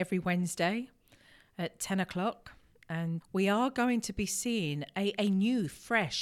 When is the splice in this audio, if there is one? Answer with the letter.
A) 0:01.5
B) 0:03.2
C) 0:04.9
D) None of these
B